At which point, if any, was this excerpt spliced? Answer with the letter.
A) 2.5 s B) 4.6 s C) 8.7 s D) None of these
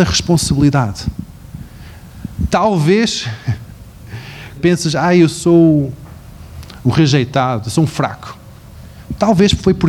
B